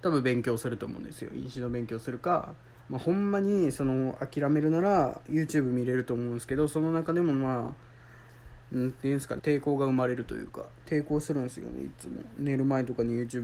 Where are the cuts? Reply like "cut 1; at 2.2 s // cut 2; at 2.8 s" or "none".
cut 1; at 9.4 s